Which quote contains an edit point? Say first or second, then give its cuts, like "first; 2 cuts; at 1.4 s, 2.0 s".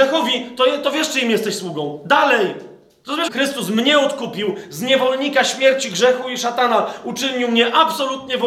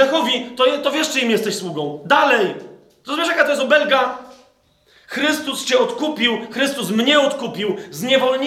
first; 1 cut; at 3.3 s